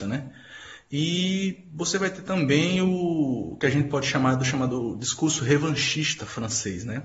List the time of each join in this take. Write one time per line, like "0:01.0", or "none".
none

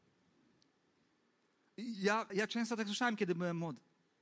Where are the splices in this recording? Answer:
0:02.3

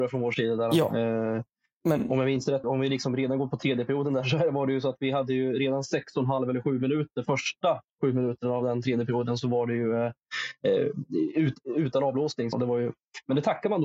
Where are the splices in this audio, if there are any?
0:02.6
0:12.5

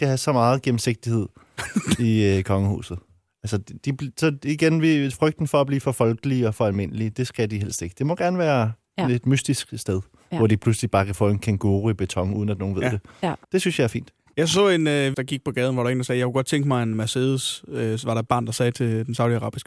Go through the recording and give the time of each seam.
0:13.4
0:15.1

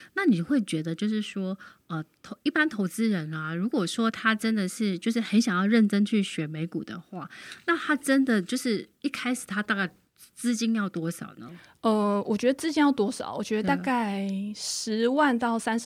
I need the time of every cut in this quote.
none

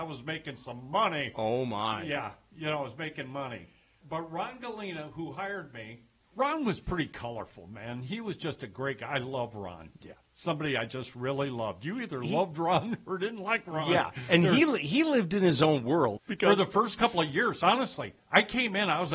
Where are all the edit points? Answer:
0:16.2

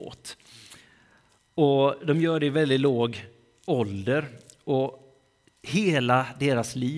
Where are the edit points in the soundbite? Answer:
none

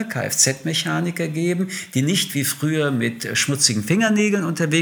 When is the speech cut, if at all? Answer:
none

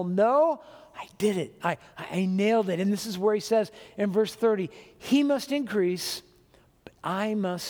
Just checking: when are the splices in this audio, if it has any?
none

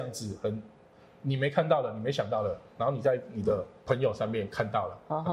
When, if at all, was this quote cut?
0:03.8

